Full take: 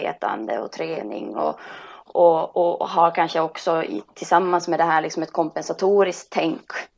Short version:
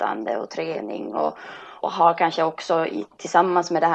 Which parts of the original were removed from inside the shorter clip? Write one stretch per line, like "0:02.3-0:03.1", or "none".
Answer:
0:02.0-0:02.8